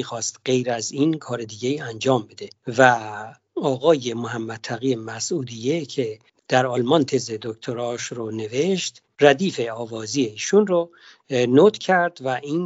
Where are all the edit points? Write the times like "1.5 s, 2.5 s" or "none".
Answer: none